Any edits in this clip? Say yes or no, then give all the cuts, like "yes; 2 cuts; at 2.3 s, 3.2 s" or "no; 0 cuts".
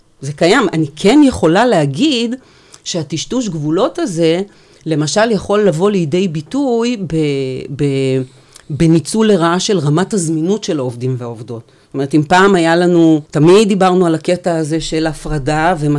yes; 1 cut; at 13.3 s